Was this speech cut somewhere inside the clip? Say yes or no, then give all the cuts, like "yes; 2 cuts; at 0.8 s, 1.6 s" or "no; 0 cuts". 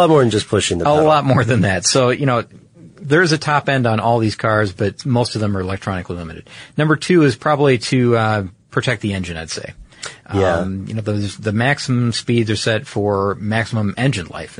no; 0 cuts